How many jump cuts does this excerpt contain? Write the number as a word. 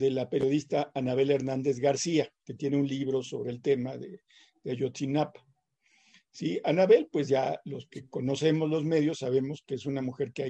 zero